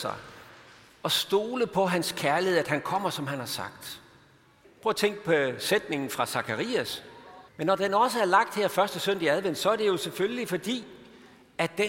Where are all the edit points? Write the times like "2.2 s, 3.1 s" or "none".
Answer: 4.6 s, 7.5 s